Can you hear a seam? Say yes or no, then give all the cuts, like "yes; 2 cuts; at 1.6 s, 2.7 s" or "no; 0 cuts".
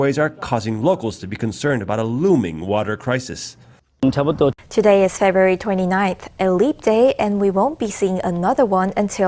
yes; 1 cut; at 4.6 s